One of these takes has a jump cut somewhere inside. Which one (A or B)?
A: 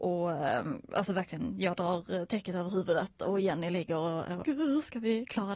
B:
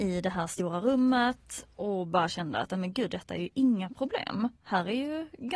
A